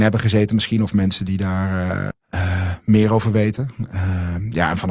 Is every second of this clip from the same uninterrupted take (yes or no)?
no